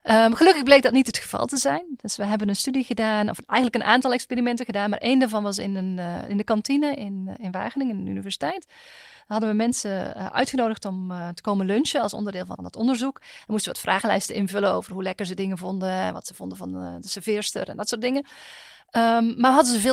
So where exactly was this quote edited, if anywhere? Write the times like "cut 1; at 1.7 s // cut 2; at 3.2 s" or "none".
cut 1; at 12.6 s